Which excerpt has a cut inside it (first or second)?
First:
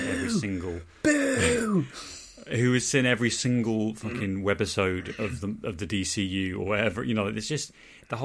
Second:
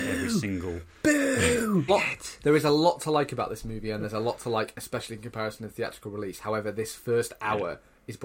second